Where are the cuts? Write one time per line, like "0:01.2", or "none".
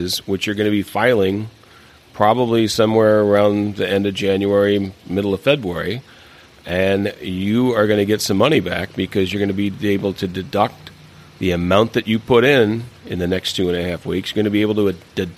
none